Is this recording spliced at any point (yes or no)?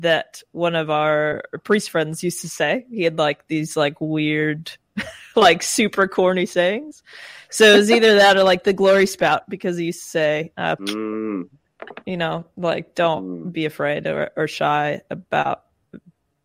yes